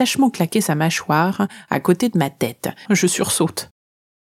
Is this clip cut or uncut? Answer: cut